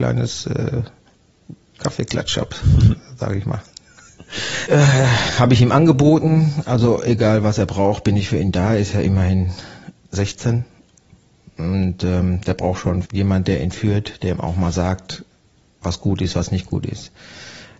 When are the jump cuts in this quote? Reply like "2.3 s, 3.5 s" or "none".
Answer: 4.7 s, 13.0 s

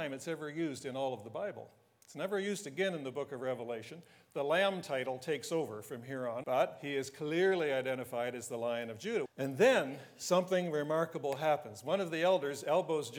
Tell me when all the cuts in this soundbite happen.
6.4 s, 9.3 s

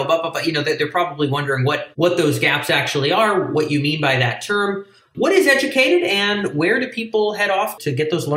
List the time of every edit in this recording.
1.9 s

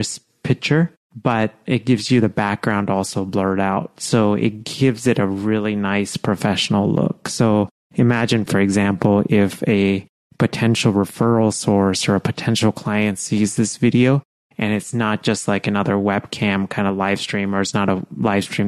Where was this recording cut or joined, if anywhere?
none

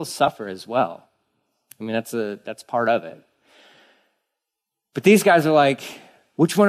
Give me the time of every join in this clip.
none

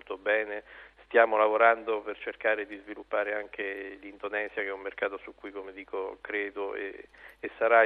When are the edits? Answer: none

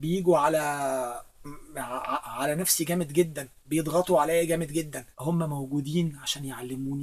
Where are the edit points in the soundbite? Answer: 5.1 s

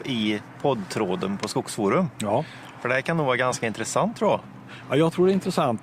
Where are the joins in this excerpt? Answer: none

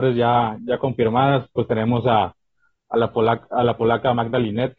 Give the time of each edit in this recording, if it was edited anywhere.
none

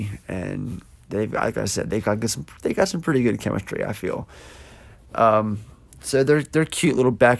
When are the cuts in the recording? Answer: none

